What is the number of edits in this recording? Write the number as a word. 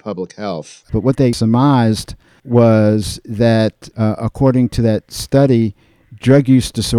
zero